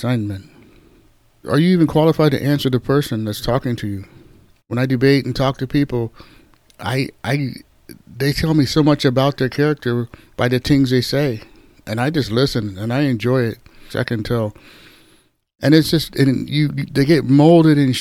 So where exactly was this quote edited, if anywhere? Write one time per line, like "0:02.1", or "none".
0:01.4
0:04.6
0:13.9